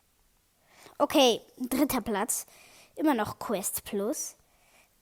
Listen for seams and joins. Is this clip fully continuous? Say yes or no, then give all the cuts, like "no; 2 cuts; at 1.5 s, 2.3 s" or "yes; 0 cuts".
yes; 0 cuts